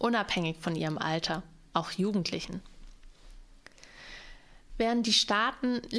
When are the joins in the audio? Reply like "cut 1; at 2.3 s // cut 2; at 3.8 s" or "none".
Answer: cut 1; at 1.7 s